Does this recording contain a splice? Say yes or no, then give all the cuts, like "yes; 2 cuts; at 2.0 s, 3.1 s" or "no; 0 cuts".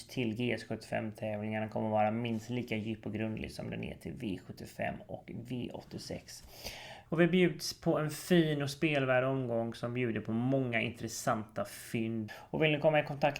yes; 2 cuts; at 7.1 s, 12.3 s